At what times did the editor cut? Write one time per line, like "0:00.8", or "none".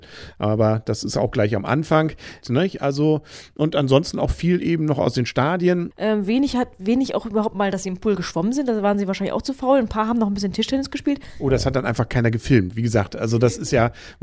0:02.4
0:05.9